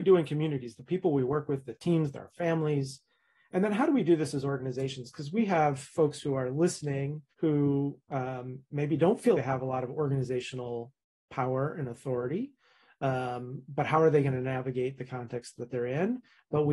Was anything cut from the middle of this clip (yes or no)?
yes